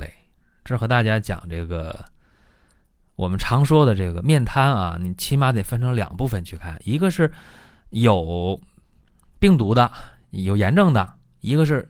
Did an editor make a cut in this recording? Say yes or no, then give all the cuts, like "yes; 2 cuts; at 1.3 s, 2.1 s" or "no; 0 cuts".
no; 0 cuts